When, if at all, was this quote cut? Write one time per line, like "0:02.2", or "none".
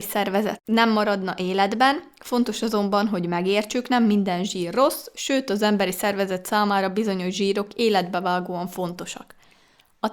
none